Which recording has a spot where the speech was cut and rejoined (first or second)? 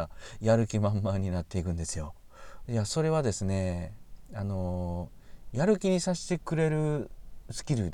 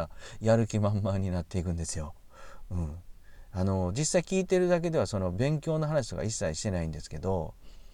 first